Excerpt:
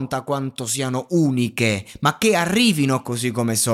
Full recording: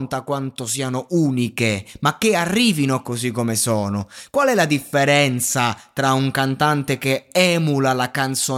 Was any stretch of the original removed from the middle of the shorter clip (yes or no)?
no